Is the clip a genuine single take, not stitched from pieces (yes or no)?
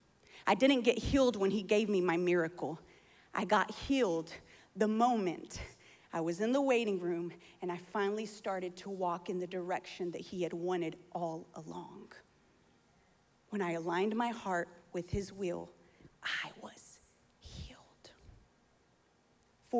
yes